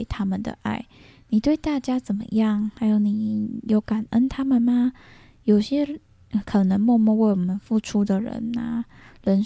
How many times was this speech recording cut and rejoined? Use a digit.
0